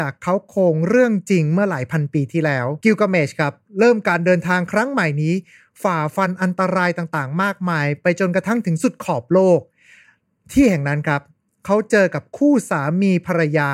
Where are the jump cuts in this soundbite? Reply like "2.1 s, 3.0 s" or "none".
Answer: 2.8 s